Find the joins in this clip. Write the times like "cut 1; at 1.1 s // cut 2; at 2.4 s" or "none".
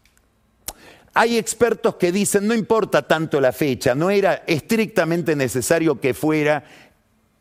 none